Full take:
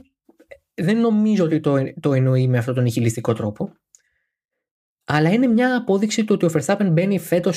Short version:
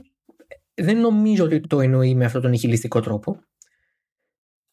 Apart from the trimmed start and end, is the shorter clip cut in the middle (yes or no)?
yes